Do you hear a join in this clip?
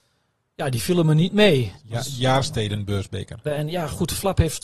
yes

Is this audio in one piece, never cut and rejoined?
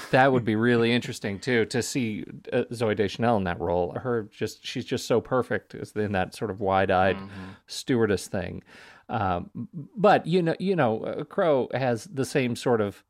no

